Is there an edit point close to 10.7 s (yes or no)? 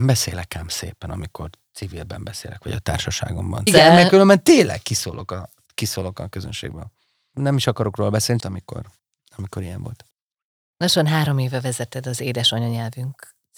no